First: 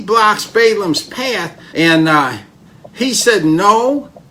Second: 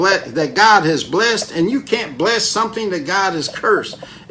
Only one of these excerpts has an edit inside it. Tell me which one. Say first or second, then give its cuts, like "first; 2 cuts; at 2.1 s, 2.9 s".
first; 1 cut; at 1.7 s